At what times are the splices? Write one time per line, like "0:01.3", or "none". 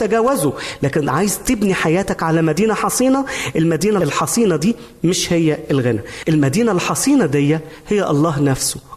none